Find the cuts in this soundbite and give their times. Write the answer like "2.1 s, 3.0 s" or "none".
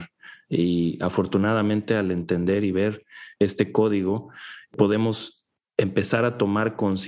none